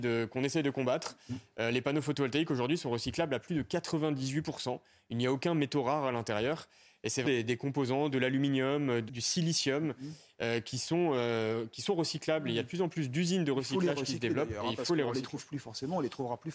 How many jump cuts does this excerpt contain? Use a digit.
2